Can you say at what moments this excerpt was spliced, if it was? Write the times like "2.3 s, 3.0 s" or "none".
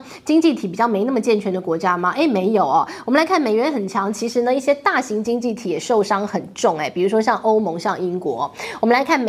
none